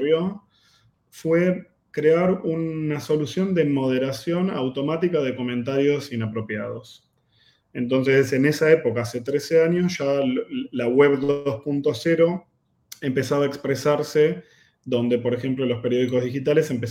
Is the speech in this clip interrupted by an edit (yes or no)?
no